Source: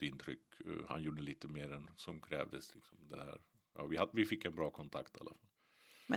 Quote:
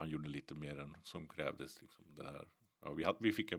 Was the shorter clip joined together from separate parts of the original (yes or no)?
no